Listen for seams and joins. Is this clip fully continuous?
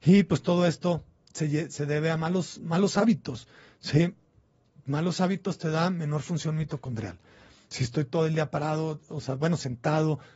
yes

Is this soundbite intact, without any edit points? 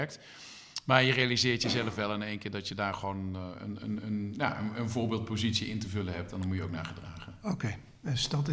yes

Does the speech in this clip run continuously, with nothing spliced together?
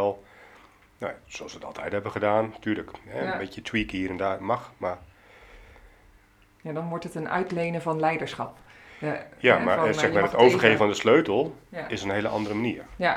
yes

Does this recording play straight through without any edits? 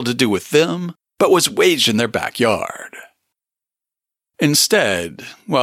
yes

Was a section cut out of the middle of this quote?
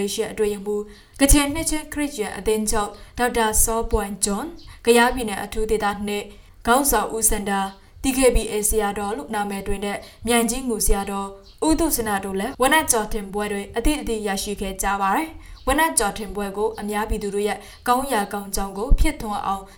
no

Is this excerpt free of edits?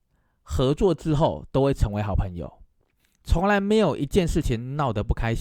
yes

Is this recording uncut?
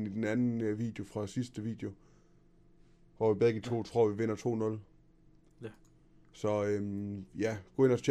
yes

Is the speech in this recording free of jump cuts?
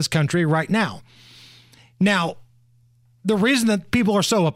yes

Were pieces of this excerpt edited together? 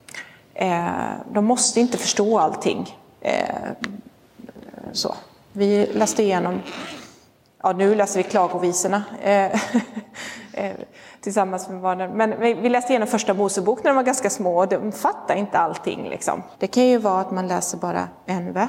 yes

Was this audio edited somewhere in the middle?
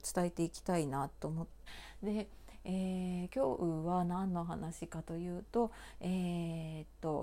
yes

